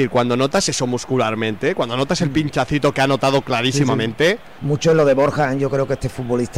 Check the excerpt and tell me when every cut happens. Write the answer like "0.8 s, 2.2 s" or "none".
4.6 s